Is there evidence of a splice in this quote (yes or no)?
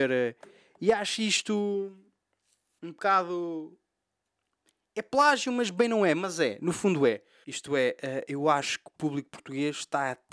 yes